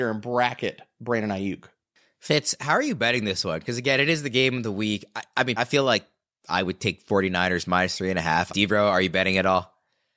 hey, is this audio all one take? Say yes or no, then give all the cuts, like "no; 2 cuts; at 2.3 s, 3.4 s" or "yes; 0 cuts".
no; 2 cuts; at 5.6 s, 8.5 s